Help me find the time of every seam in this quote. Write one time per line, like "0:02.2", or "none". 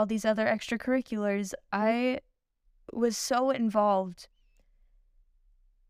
none